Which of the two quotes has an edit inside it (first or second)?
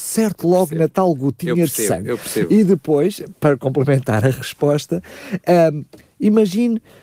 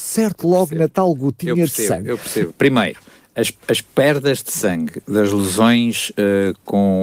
second